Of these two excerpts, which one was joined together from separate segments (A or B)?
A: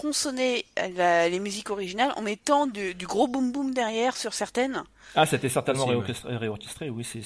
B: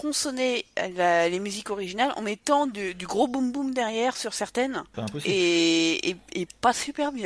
B